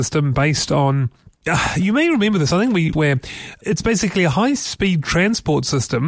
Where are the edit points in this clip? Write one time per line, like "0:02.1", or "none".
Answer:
0:02.9